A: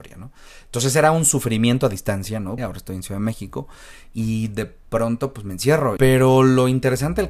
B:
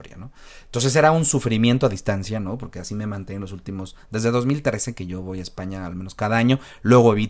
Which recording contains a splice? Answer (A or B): A